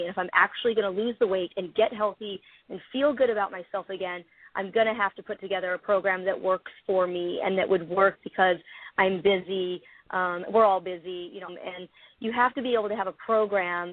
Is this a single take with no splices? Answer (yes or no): no